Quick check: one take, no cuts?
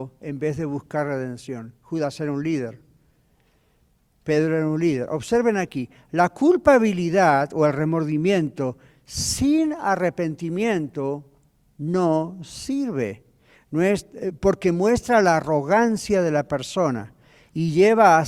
yes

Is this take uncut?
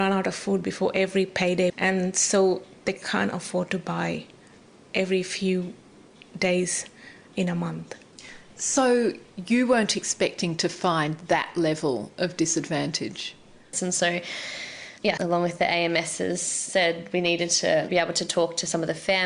no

